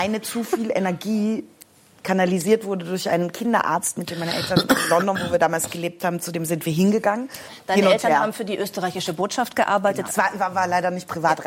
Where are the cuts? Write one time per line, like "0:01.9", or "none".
0:07.5
0:10.1